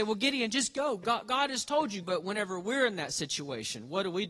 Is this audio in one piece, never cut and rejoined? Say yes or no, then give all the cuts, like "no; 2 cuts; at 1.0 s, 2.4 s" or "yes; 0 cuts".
no; 1 cut; at 2.0 s